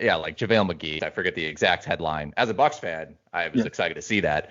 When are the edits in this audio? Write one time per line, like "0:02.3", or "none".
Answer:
0:01.0